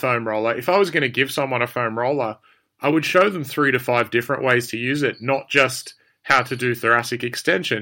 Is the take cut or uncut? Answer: uncut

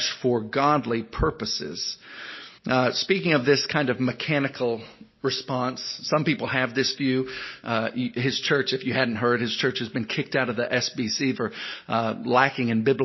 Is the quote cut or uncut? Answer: cut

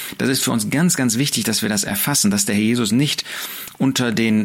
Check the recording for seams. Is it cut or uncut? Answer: uncut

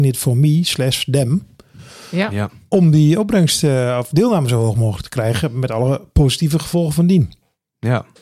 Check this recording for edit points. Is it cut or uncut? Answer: uncut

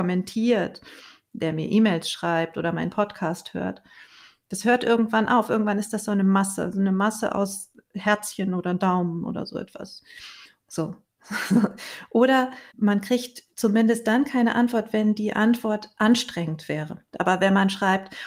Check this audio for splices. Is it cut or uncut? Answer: cut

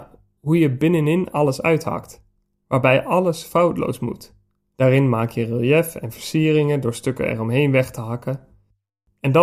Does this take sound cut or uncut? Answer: cut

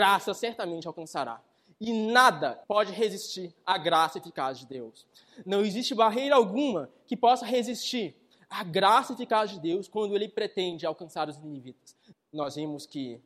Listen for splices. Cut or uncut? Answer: cut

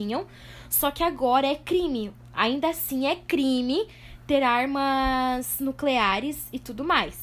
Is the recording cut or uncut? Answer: uncut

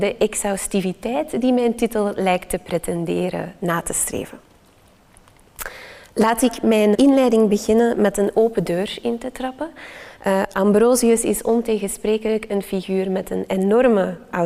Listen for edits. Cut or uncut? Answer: cut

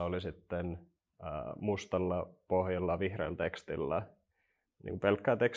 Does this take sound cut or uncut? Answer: uncut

